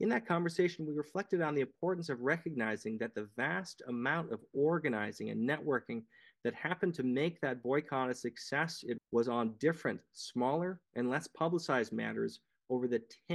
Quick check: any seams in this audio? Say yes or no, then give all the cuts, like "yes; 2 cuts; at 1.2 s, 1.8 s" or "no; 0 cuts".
yes; 1 cut; at 9.0 s